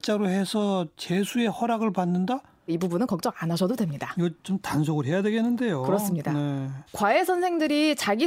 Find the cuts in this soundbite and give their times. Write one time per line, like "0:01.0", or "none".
0:02.7
0:06.9